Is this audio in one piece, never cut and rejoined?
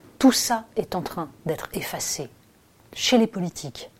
yes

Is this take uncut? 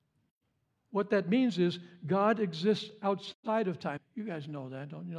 no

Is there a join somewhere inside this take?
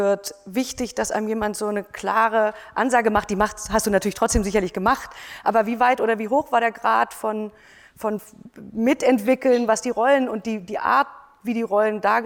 no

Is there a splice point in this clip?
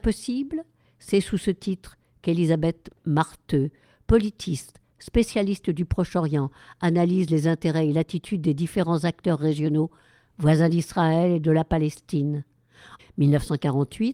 yes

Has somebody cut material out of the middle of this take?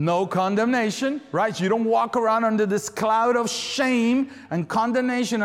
no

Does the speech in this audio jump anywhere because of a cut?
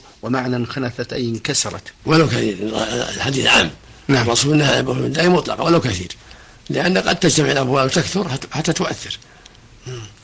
yes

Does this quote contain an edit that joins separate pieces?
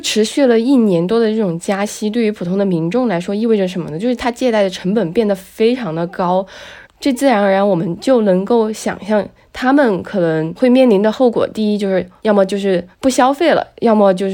no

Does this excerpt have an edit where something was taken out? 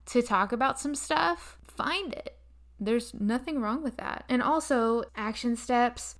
yes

